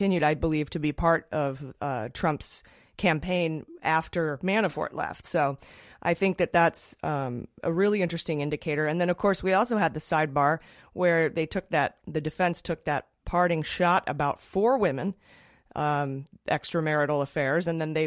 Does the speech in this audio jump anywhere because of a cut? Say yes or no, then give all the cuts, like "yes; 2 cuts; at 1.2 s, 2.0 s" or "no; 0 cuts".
no; 0 cuts